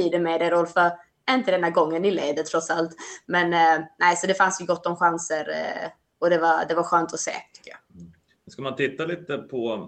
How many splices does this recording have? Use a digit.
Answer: 0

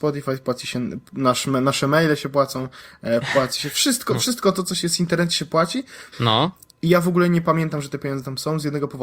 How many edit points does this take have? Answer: 1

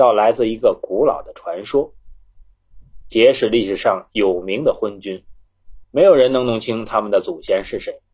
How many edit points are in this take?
2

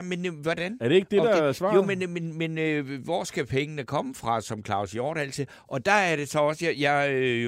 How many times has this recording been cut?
1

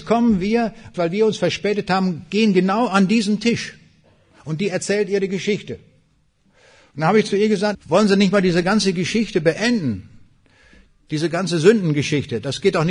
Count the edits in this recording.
2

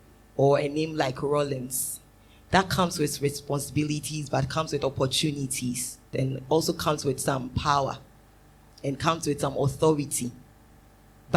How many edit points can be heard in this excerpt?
1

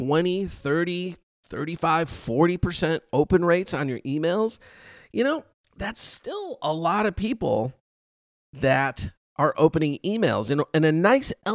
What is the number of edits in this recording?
0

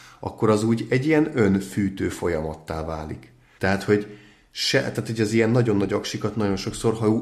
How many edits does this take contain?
1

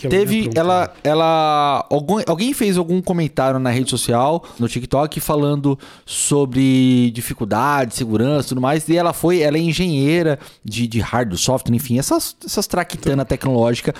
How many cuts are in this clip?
1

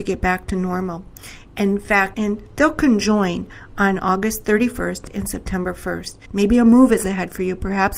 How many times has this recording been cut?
2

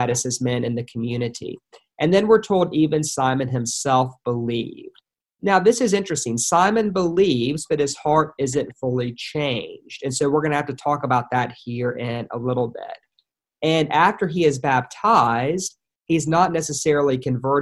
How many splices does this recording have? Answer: 0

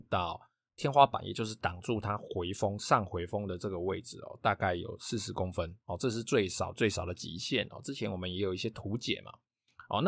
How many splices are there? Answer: 0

